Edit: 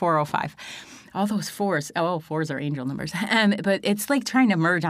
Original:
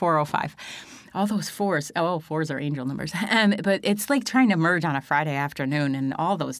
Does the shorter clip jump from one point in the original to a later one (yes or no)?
no